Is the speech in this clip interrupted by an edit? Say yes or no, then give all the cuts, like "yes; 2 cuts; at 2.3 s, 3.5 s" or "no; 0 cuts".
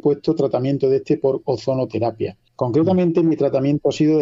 yes; 1 cut; at 2.5 s